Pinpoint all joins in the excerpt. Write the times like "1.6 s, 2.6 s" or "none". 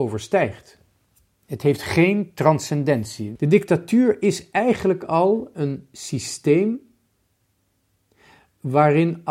1.4 s, 3.4 s